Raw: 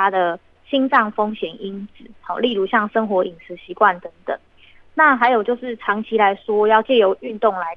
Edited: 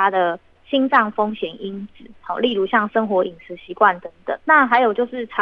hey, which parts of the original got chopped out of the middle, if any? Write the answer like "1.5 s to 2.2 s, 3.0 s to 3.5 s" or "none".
4.4 s to 4.9 s